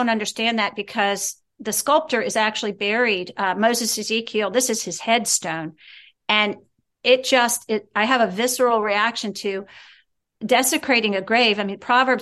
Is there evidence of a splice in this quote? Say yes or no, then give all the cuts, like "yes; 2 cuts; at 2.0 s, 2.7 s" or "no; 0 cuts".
no; 0 cuts